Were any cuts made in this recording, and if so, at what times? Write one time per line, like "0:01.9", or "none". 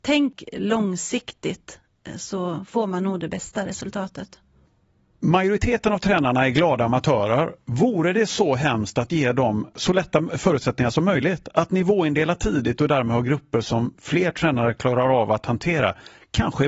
none